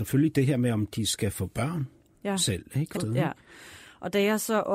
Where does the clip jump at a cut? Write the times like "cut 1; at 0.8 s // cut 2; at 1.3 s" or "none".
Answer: cut 1; at 3.0 s